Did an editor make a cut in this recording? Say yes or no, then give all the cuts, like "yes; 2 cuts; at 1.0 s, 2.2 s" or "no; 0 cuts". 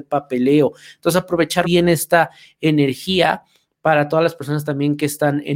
yes; 1 cut; at 1.6 s